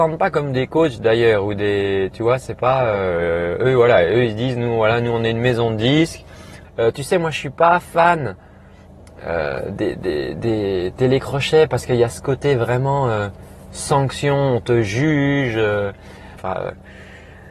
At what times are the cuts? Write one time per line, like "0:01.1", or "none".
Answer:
0:06.6
0:16.4